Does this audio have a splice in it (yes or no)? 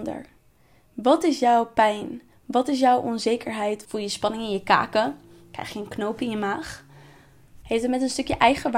yes